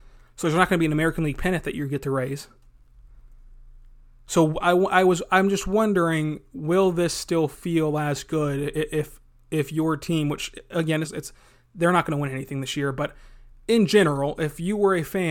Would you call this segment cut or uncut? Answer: cut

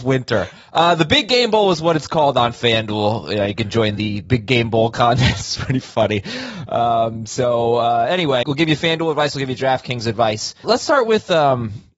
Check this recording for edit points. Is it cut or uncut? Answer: cut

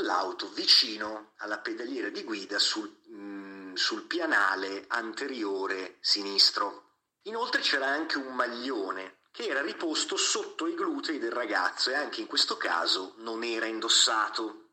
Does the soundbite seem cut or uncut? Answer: cut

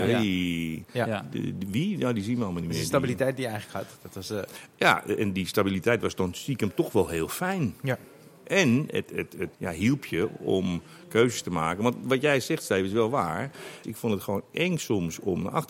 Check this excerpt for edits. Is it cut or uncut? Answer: cut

